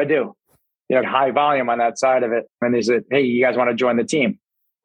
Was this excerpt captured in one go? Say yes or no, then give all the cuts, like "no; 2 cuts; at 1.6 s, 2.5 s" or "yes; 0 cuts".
no; 2 cuts; at 1.0 s, 2.5 s